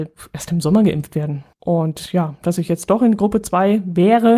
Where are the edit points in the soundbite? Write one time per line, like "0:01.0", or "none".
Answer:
0:01.5

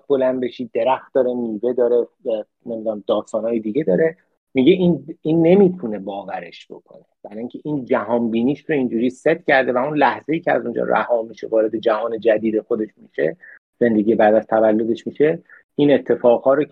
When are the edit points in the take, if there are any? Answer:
none

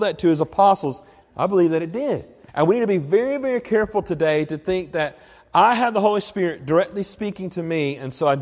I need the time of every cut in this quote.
0:01.2
0:02.5

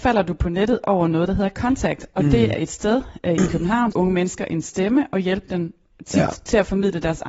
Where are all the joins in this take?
0:02.5
0:03.9

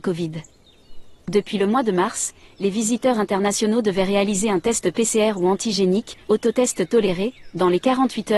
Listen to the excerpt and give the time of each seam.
none

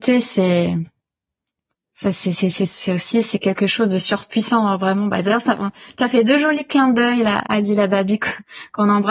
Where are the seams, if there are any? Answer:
0:07.4

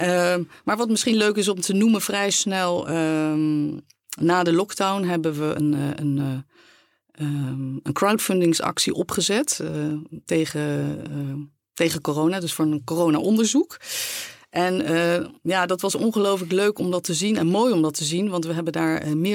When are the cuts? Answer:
none

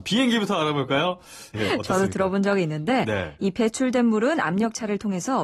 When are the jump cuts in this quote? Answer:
0:01.5
0:03.4

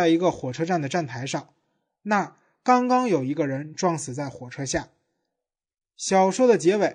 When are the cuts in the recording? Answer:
none

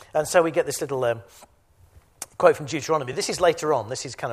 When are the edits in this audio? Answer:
none

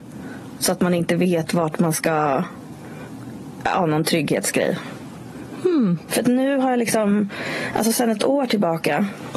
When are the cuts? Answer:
0:06.1

